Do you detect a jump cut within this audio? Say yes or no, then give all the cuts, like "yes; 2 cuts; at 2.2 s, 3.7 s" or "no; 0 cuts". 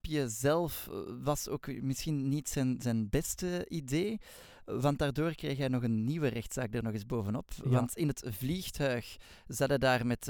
no; 0 cuts